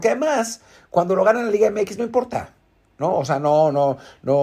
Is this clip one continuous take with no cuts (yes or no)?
yes